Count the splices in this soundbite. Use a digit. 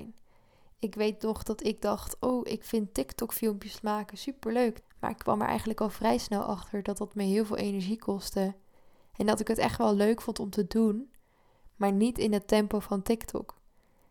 1